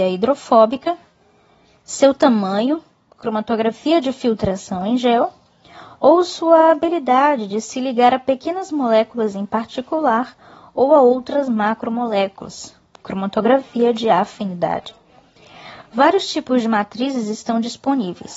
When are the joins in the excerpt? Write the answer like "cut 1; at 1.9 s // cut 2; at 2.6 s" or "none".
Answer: none